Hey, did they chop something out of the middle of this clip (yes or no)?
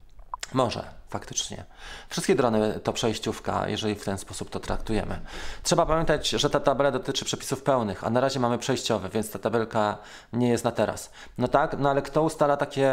no